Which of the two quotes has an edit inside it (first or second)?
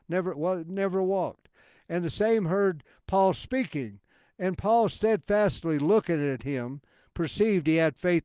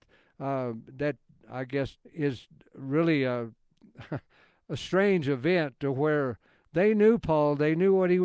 second